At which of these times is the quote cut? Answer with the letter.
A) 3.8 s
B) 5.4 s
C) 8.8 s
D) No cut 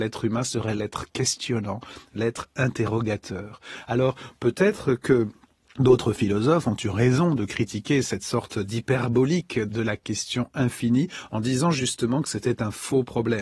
D